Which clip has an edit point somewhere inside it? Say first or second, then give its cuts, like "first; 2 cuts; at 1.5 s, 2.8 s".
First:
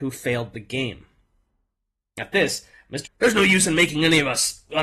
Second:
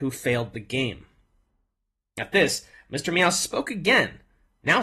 first; 1 cut; at 3.1 s